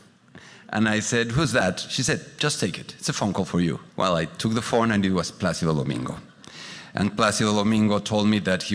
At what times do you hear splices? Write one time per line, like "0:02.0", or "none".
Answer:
0:03.9

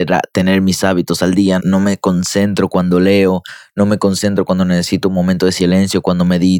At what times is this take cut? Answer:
0:01.6

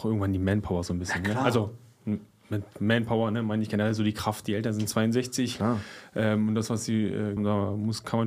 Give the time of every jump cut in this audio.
0:04.4
0:07.4

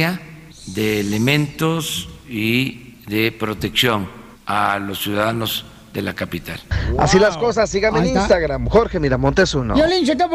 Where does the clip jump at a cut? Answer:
none

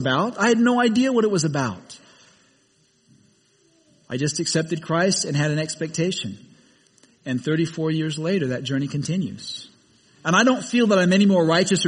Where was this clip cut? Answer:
none

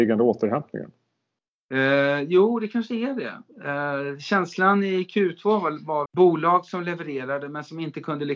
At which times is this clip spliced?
0:06.1

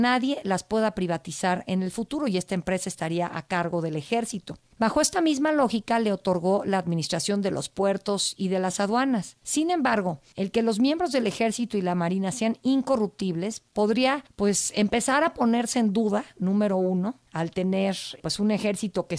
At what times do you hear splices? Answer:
none

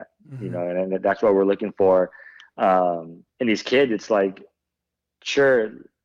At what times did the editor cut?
0:03.3

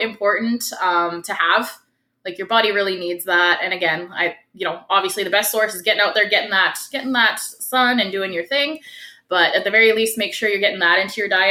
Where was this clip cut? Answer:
none

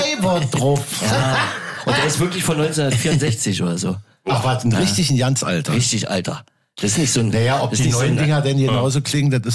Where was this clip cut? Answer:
none

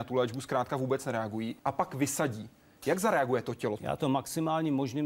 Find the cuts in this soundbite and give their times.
0:01.6
0:03.8

